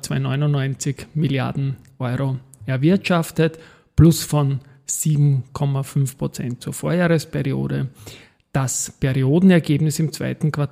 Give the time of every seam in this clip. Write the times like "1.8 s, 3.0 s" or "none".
none